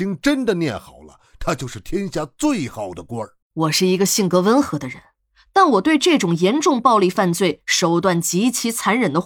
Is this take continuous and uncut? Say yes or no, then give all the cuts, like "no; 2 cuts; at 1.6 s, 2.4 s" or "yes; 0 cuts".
no; 1 cut; at 3.4 s